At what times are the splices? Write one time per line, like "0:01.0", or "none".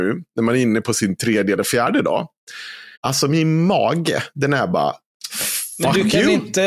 0:02.9